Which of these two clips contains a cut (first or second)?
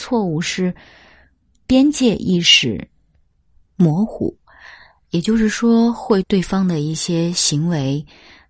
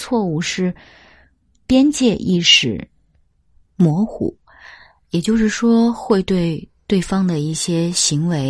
first